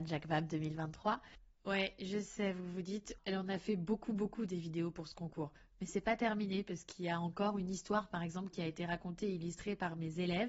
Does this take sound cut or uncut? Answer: cut